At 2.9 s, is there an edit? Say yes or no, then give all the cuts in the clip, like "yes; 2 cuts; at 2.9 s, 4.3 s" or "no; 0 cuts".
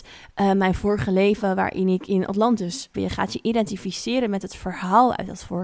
yes; 1 cut; at 2.9 s